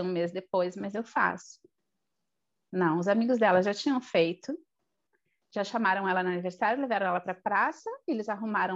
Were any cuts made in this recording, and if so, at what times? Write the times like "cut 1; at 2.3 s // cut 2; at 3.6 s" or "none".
none